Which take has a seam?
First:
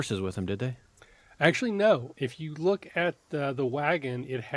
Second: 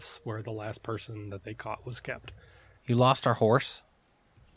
second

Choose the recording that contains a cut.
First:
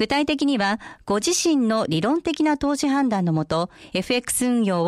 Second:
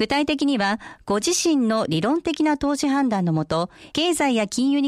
second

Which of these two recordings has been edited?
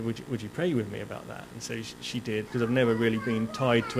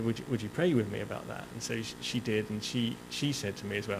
first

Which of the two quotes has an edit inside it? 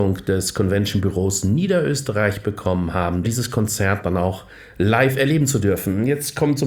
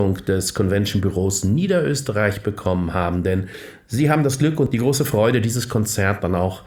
first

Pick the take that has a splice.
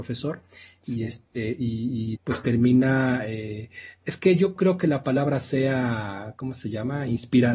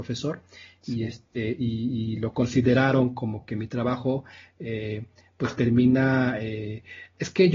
first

